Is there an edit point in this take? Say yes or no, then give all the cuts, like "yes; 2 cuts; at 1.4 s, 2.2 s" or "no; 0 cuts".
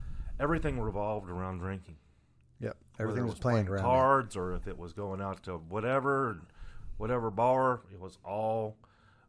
no; 0 cuts